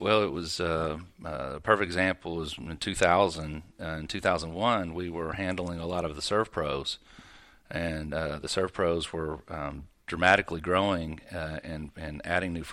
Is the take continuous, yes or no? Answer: yes